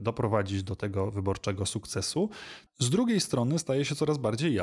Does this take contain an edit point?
yes; 1 cut; at 2.7 s

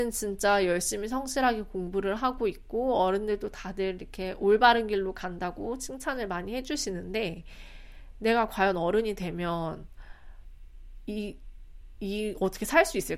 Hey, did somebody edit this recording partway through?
no; 0 cuts

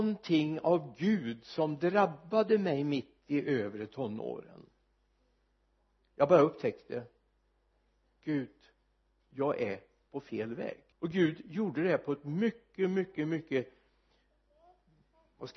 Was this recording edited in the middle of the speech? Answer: yes; 1 cut; at 10.9 s

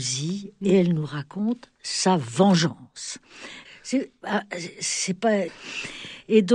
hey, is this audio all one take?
no; 2 cuts; at 3.6 s, 5.5 s

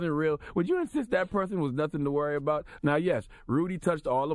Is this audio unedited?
no; 1 cut; at 2.8 s

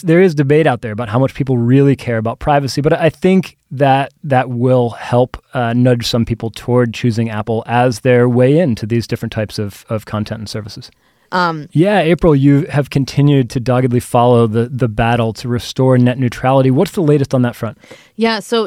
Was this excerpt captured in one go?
no; 1 cut; at 11.3 s

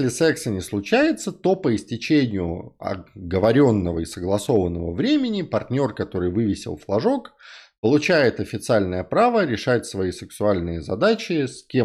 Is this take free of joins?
yes; 0 cuts

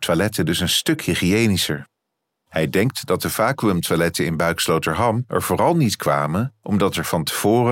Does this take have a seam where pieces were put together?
no; 0 cuts

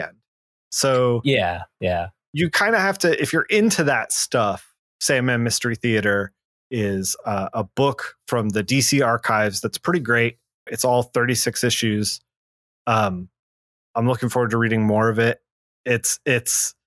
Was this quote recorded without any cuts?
no; 1 cut; at 10.7 s

